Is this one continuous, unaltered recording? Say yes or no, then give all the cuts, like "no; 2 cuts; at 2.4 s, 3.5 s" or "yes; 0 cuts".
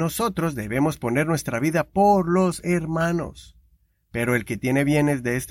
yes; 0 cuts